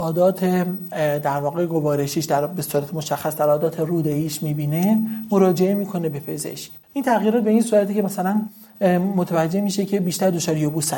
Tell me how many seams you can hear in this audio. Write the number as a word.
one